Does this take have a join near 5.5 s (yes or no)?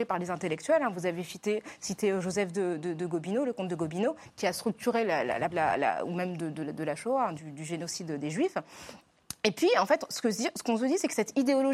yes